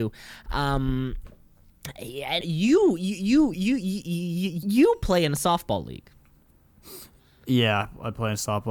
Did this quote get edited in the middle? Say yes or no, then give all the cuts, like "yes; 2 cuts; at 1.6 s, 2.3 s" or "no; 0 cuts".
yes; 3 cuts; at 2.4 s, 3.5 s, 4.6 s